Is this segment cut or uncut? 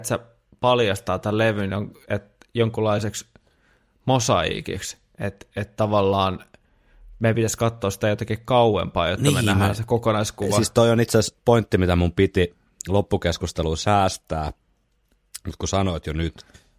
uncut